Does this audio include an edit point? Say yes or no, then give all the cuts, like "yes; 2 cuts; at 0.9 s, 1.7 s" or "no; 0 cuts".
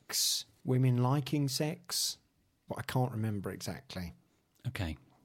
yes; 1 cut; at 2.7 s